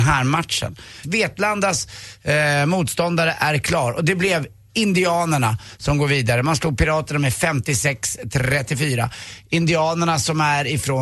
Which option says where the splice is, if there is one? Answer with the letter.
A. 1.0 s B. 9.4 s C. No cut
A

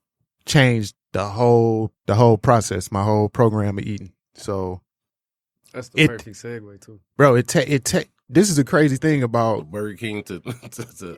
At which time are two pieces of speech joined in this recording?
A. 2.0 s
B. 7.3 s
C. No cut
A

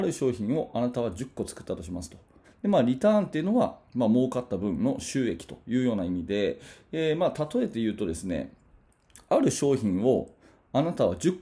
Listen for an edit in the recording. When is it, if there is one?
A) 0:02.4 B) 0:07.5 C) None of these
A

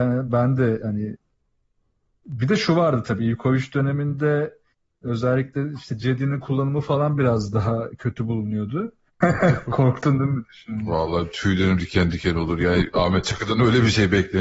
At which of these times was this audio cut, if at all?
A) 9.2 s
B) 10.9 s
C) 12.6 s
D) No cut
A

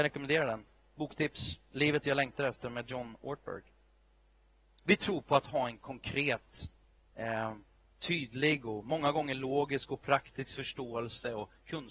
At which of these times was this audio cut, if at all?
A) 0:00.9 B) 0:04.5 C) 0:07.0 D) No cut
D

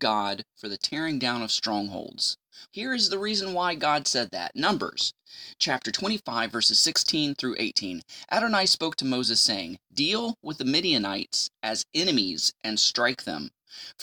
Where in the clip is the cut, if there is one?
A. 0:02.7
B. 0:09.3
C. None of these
A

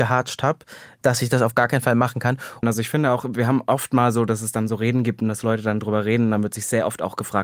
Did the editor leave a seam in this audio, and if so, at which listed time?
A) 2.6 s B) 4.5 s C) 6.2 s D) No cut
A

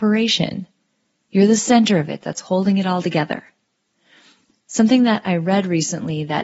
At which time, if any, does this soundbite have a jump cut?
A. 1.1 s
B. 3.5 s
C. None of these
C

